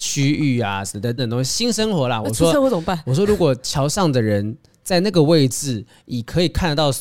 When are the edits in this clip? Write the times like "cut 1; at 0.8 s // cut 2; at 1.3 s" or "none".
cut 1; at 1.2 s // cut 2; at 2.2 s